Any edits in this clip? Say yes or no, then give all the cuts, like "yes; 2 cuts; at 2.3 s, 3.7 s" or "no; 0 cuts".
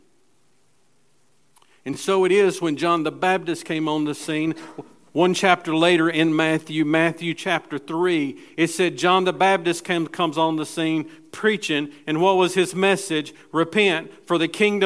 no; 0 cuts